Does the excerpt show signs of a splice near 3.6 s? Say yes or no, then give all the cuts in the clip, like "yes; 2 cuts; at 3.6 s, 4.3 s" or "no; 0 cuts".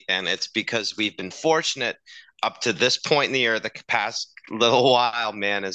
no; 1 cut; at 1.3 s